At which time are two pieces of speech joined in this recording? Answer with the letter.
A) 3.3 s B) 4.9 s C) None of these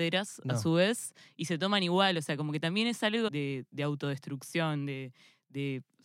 A